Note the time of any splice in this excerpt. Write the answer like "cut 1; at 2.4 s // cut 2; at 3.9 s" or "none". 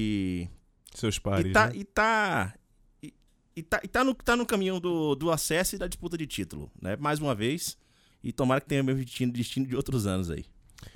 cut 1; at 8.1 s